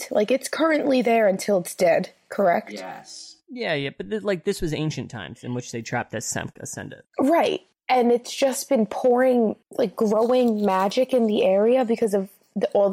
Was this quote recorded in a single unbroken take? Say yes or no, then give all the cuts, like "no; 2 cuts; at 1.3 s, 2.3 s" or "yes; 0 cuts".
yes; 0 cuts